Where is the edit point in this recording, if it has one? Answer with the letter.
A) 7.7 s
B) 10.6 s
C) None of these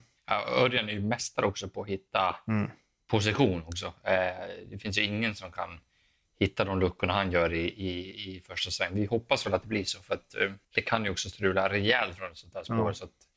B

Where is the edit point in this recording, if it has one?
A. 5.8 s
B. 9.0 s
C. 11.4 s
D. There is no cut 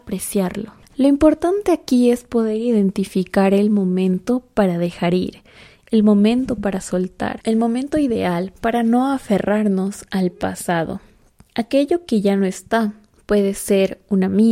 D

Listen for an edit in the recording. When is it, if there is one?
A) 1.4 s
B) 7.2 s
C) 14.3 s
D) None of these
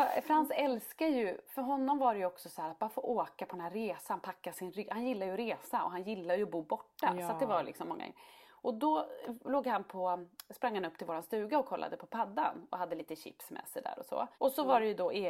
C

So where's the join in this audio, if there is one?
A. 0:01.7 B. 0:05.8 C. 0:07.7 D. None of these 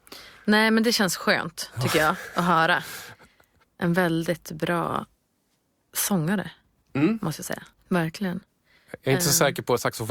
C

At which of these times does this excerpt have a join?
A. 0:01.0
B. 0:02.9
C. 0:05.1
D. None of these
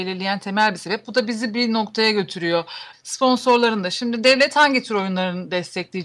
B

